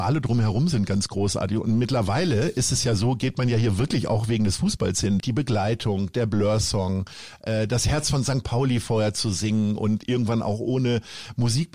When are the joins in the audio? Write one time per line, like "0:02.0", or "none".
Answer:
0:05.2